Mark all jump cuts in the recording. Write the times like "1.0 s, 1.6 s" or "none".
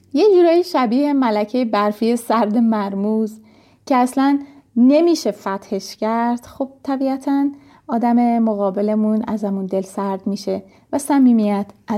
none

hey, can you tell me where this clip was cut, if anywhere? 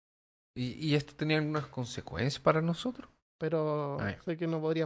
3.3 s

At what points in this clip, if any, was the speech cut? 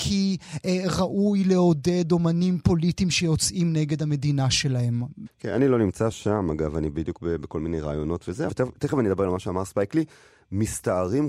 5.3 s, 8.5 s

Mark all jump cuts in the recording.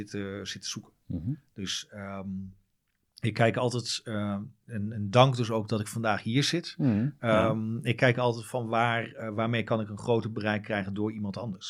1.0 s

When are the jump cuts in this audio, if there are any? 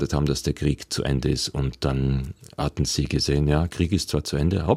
none

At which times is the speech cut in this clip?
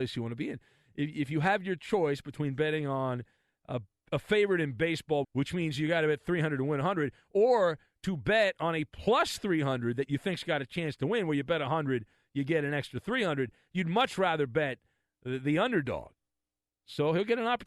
5.2 s

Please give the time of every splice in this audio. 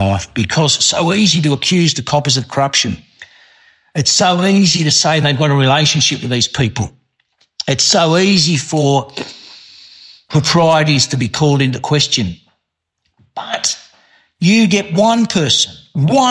none

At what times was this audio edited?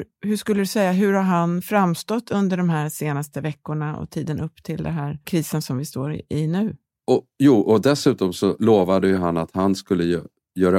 5.2 s, 7.0 s

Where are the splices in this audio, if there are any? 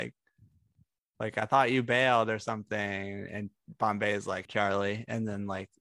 4.5 s

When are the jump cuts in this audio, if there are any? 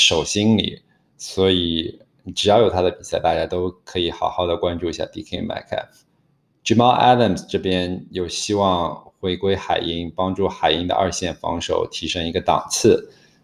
none

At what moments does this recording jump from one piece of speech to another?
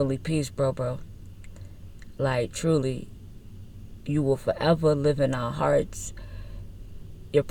none

